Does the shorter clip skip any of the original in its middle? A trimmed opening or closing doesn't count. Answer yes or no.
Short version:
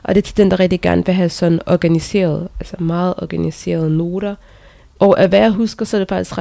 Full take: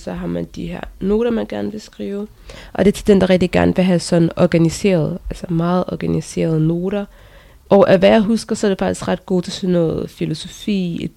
no